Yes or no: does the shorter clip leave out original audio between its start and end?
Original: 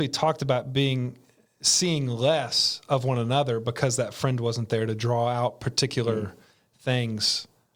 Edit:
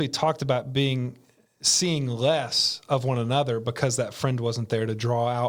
no